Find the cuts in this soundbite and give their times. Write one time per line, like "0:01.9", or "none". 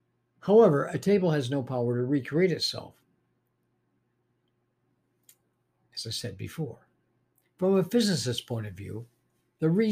none